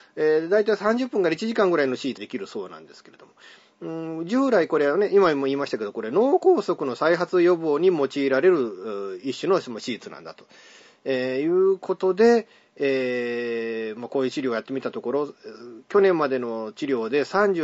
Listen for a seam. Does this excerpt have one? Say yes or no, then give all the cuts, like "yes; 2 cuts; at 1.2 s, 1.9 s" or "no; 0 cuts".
yes; 1 cut; at 2.2 s